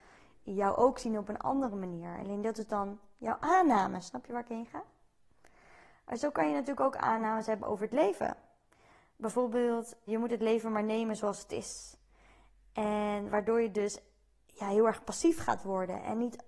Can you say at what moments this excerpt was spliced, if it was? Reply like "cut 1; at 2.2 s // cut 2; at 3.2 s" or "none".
cut 1; at 10.1 s

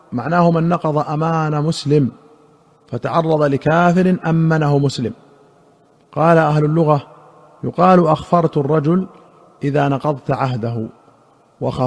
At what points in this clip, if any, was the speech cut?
none

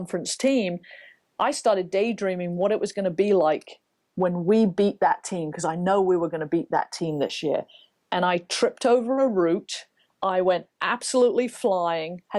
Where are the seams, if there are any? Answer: none

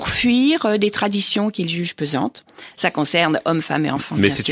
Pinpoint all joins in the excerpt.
cut 1; at 2.7 s

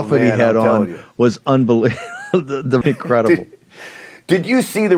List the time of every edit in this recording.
cut 1; at 2.8 s

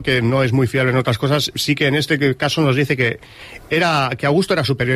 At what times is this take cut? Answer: none

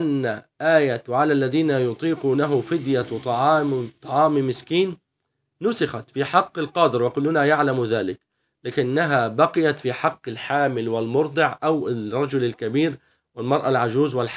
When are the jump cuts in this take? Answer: none

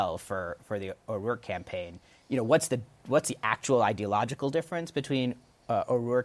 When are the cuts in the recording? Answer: none

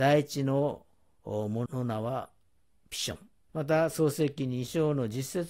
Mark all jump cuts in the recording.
cut 1; at 1.7 s // cut 2; at 3.5 s

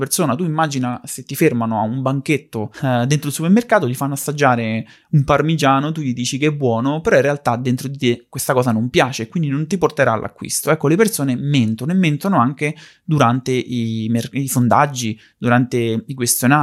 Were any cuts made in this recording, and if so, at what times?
none

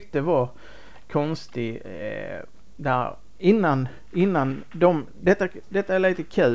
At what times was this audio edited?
none

